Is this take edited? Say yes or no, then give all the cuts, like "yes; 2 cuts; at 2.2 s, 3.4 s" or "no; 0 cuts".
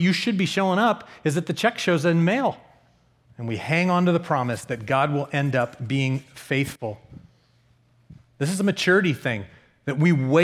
yes; 1 cut; at 3.2 s